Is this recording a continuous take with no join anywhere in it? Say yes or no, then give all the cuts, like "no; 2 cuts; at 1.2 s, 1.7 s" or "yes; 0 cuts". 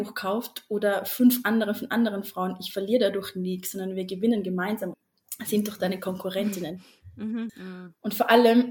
no; 2 cuts; at 4.9 s, 7.5 s